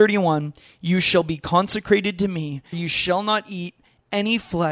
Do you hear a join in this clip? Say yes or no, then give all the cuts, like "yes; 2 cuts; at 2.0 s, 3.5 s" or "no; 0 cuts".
yes; 1 cut; at 2.7 s